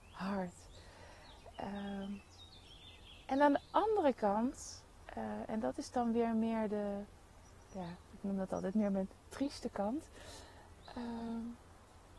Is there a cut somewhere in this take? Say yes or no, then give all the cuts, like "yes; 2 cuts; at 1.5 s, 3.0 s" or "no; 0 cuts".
no; 0 cuts